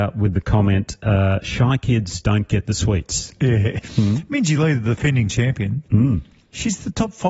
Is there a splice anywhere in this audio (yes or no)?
yes